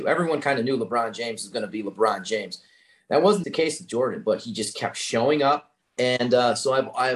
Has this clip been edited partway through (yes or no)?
yes